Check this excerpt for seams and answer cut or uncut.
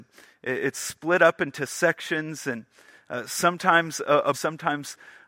cut